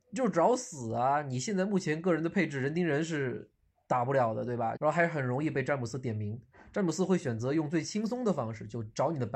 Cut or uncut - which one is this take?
cut